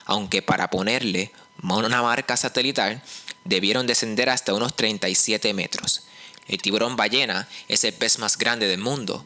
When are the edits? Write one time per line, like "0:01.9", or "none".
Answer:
0:06.4